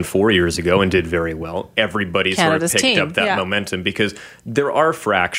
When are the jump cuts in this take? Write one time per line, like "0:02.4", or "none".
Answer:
none